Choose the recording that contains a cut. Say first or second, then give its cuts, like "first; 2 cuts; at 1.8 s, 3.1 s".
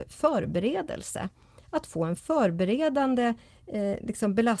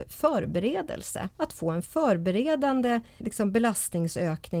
second; 2 cuts; at 1.3 s, 3.2 s